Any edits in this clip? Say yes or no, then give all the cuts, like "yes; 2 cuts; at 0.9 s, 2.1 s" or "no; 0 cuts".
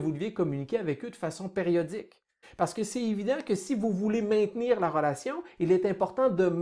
yes; 1 cut; at 2.4 s